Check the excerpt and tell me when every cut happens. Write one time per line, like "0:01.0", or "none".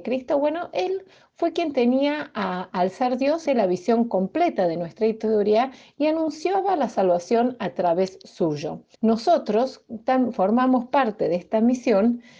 0:03.5
0:08.9

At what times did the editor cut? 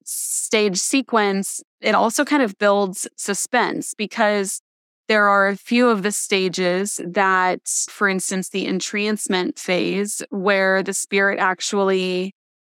0:07.9

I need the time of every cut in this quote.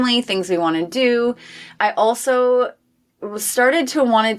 none

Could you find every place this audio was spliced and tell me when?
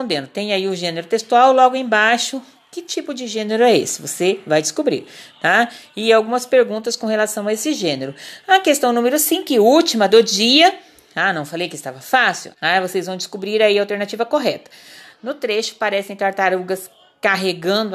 0:12.5
0:15.1

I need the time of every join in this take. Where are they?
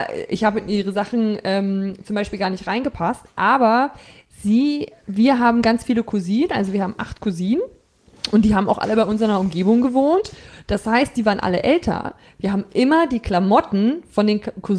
none

